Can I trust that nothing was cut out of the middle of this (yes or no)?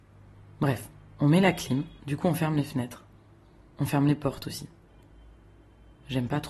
no